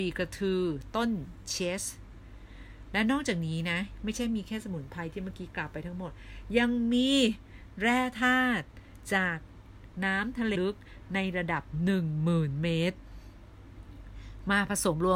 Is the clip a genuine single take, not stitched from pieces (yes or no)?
no